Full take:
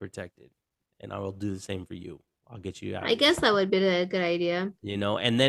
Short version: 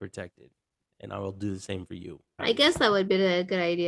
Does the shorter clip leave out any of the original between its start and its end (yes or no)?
yes